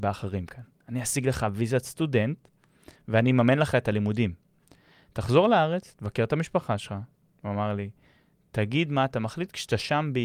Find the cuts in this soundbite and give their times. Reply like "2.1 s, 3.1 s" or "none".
none

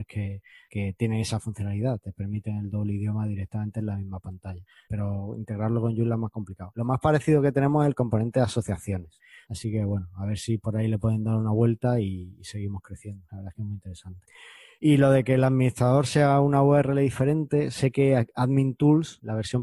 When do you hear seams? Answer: none

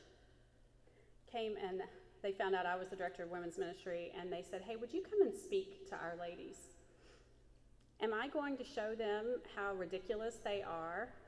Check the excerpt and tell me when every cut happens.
none

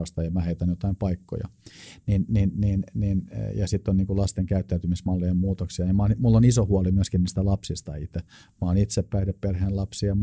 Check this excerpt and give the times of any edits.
none

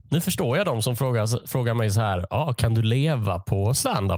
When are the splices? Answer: none

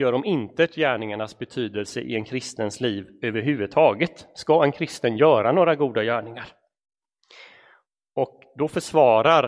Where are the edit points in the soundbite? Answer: none

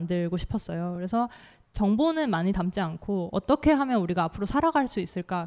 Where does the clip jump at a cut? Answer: none

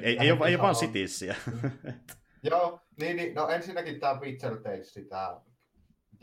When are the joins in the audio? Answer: none

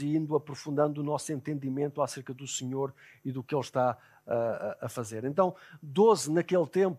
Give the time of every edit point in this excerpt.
none

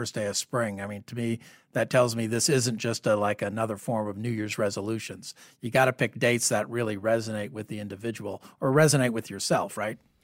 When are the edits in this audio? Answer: none

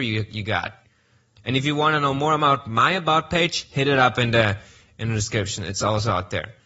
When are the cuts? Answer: 1.3 s

